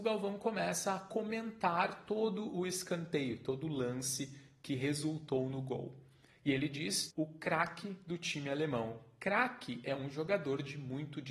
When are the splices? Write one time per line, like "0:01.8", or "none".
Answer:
0:07.1

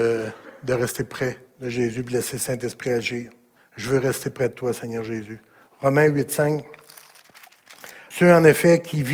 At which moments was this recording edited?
0:03.6
0:08.1

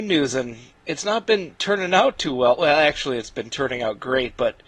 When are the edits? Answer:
none

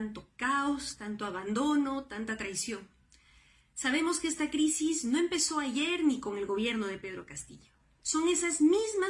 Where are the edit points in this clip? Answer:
0:08.0

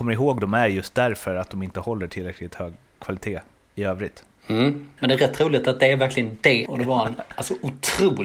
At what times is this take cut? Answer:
0:05.0
0:06.7

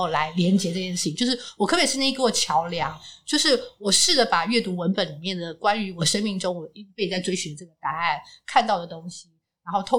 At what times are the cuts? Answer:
none

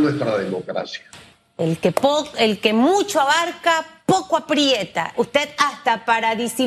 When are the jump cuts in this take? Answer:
0:01.5
0:05.1

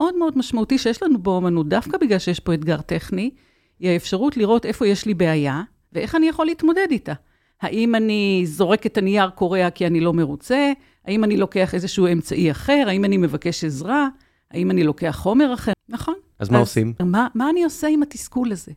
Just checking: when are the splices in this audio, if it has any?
0:15.7
0:17.0

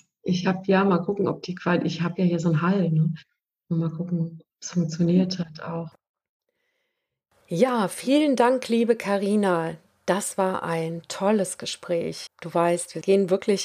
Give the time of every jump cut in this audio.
0:12.3

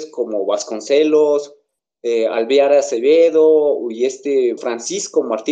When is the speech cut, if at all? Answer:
0:04.6

